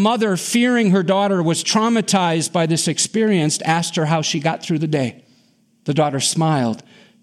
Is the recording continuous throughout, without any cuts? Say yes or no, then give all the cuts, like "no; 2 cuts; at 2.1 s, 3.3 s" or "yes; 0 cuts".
yes; 0 cuts